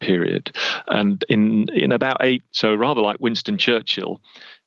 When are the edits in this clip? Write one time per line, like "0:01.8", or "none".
0:02.5